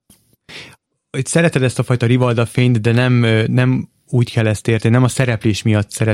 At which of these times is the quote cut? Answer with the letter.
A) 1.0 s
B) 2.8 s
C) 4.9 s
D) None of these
D